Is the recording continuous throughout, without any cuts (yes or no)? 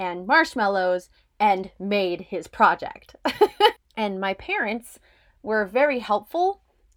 no